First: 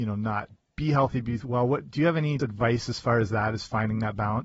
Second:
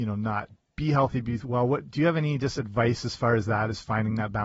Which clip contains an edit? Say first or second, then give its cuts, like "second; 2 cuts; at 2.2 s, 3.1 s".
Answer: first; 1 cut; at 2.4 s